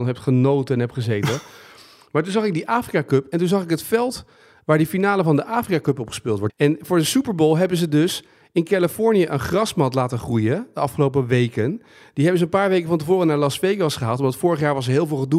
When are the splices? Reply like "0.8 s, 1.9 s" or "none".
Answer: 6.5 s